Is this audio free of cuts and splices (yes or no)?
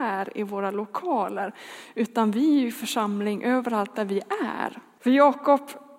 no